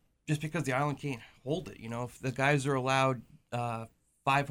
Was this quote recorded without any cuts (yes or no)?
yes